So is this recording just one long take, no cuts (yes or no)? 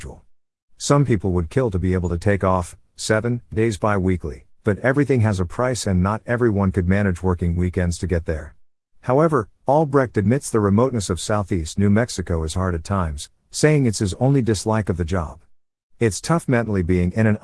no